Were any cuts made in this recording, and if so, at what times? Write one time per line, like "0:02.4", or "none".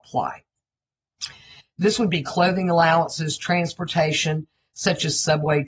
0:01.6